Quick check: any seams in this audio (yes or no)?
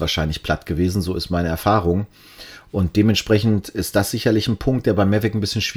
no